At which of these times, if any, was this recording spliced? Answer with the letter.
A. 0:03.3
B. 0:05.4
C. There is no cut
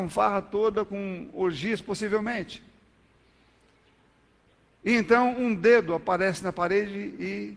C